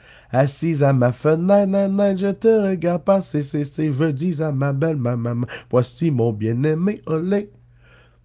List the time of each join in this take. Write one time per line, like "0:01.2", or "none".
none